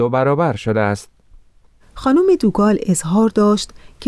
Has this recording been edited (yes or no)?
no